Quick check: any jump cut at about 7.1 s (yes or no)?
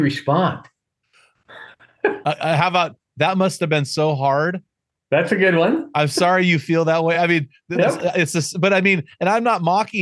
no